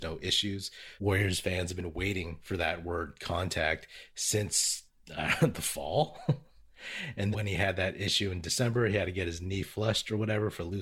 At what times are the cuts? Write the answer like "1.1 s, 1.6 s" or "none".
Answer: 1.0 s, 7.3 s